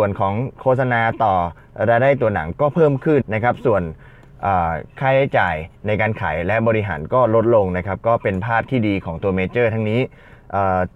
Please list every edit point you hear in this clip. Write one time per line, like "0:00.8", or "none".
0:03.2